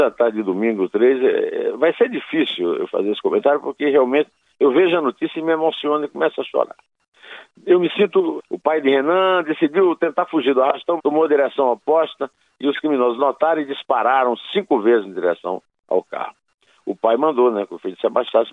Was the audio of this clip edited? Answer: yes; 2 cuts; at 8.4 s, 11.0 s

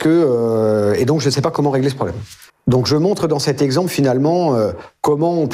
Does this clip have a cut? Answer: yes; 1 cut; at 2.5 s

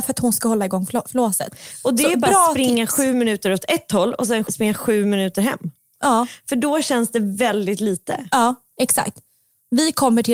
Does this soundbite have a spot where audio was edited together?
yes; 1 cut; at 4.5 s

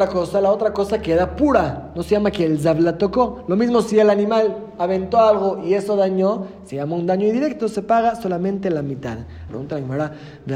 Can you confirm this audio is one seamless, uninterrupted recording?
no; 1 cut; at 9.5 s

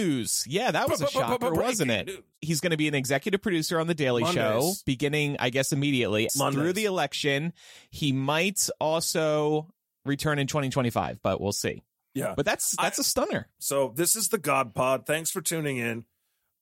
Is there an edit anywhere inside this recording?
yes; 2 cuts; at 6.3 s, 13.6 s

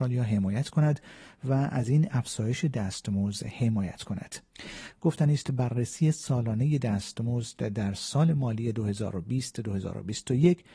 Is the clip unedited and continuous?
no; 1 cut; at 4.9 s

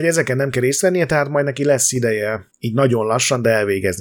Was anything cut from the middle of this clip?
yes; 1 cut; at 2.5 s

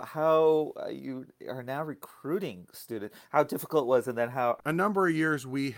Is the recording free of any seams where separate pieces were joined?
no; 1 cut; at 4.6 s

